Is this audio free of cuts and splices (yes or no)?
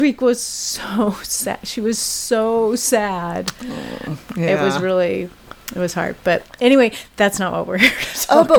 yes